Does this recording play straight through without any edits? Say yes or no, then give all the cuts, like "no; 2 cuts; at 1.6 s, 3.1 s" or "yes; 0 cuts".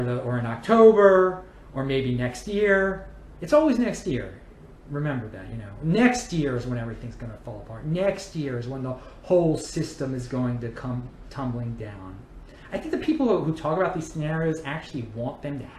yes; 0 cuts